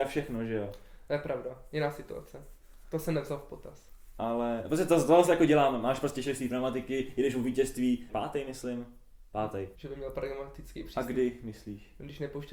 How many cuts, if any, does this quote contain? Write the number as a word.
two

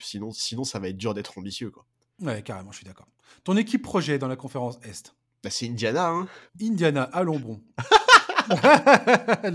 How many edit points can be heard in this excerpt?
one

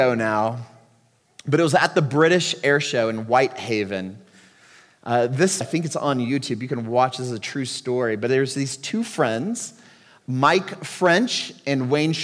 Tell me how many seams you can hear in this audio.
one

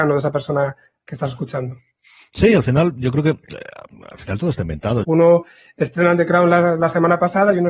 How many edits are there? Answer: one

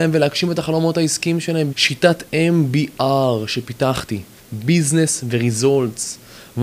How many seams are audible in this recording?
two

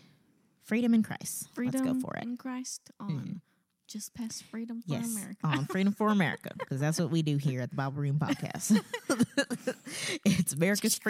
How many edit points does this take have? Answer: zero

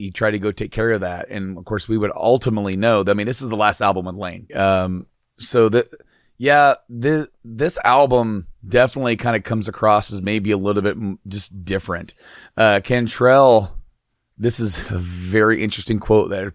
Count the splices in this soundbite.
one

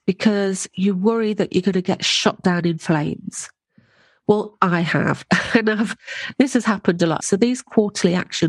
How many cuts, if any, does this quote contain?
one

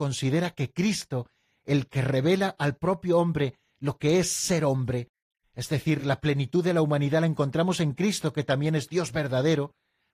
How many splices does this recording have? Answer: zero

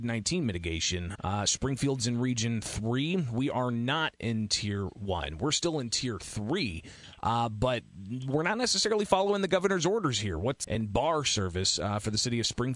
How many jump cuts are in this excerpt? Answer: two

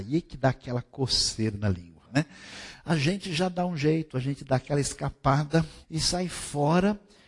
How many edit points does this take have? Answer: three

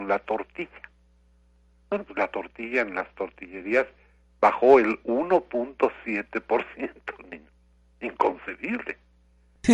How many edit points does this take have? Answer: zero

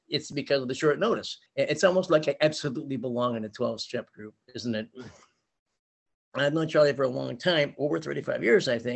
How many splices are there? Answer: one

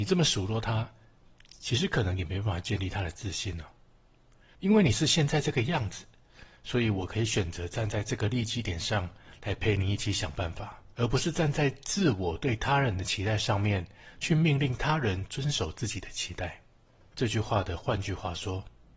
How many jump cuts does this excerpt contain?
three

